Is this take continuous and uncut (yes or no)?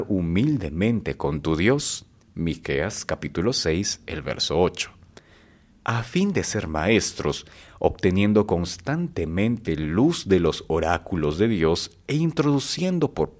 no